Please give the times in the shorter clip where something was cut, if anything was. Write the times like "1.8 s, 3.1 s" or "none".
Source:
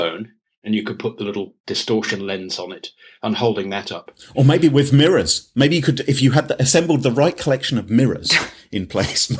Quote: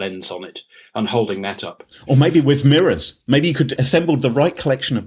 3.8 s